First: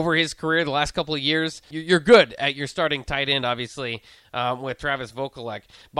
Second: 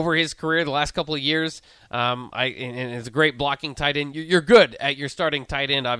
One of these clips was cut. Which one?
first; 1 cut; at 1.7 s

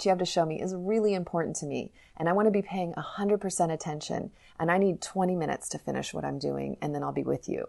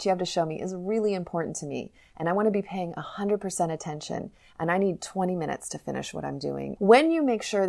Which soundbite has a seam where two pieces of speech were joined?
second; 1 cut; at 6.8 s

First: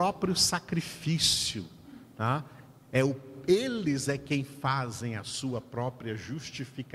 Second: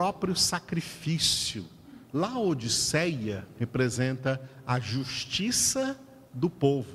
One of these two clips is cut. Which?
second; 1 cut; at 2.1 s

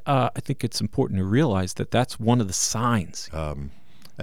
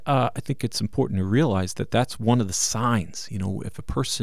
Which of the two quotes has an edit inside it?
first; 1 cut; at 3.3 s

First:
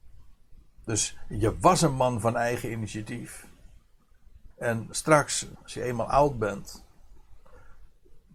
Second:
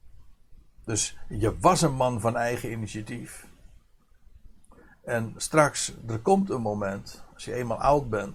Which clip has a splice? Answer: first; 2 cuts; at 4.5 s, 5.6 s

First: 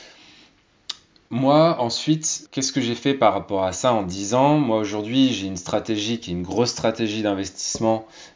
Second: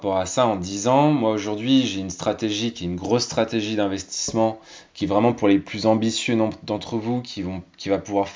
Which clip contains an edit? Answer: first; 2 cuts; at 1.3 s, 2.4 s

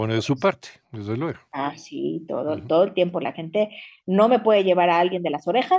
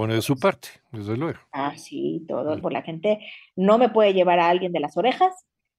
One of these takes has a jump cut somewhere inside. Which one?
second; 1 cut; at 2.6 s

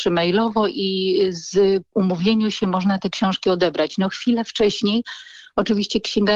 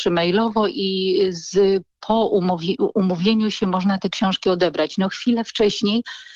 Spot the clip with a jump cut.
first; 1 cut; at 1.9 s

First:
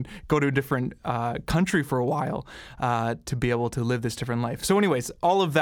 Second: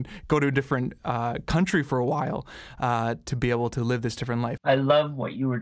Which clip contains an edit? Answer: second; 1 cut; at 4.6 s

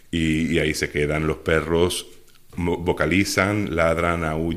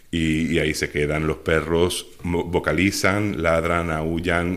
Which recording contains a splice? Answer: second; 1 cut; at 2.2 s

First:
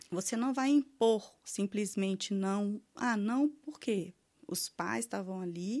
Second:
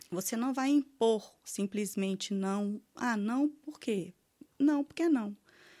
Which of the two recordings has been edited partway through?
first; 1 cut; at 4.3 s

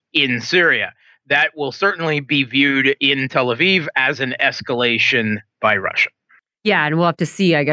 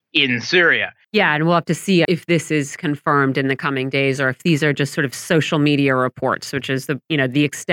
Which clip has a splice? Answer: second; 2 cuts; at 1.0 s, 2.0 s

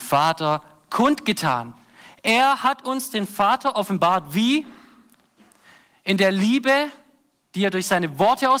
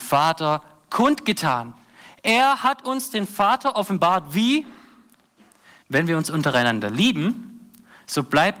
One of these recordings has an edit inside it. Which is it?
second; 1 cut; at 5.8 s

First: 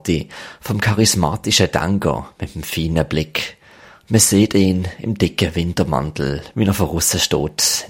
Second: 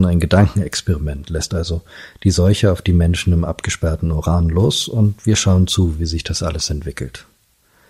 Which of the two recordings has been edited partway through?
first; 1 cut; at 4.0 s

